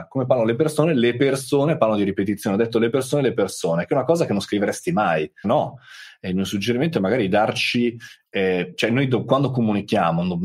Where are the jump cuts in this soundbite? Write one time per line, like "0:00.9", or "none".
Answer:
0:05.4